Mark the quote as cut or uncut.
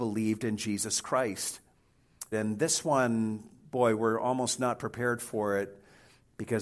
cut